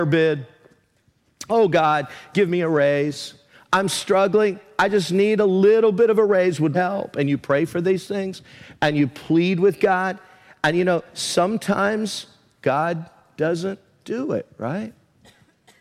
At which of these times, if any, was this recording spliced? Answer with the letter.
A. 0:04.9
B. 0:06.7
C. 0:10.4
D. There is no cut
B